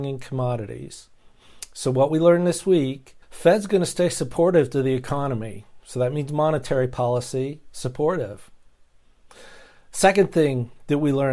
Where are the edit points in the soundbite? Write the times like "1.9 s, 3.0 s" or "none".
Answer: 3.2 s